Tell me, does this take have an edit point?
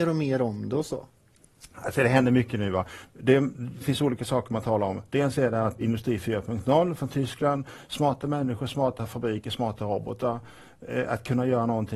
yes; 1 cut; at 5.8 s

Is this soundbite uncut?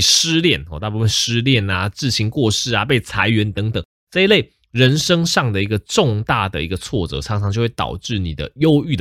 yes; 0 cuts

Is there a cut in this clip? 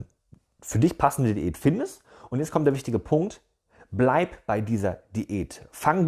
no; 0 cuts

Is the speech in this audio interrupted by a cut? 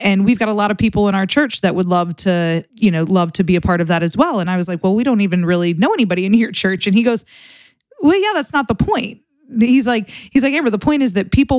no; 0 cuts

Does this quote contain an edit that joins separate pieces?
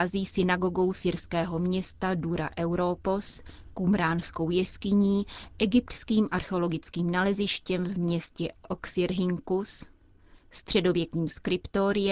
no; 0 cuts

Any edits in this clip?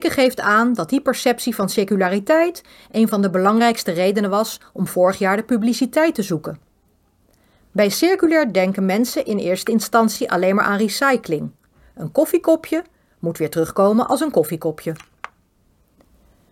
no; 0 cuts

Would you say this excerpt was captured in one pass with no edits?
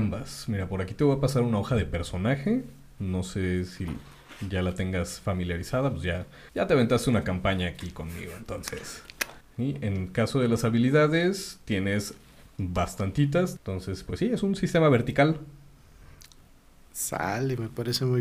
no; 3 cuts; at 6.5 s, 9.4 s, 13.6 s

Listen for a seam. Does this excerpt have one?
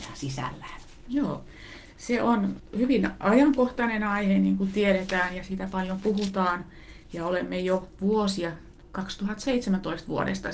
no; 0 cuts

